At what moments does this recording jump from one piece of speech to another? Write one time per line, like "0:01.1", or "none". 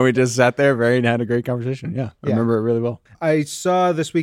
0:03.1